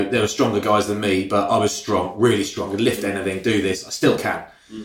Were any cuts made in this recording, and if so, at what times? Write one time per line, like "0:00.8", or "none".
none